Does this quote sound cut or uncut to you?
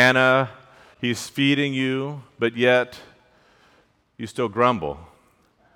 uncut